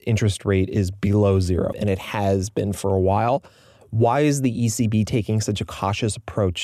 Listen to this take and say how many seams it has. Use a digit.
1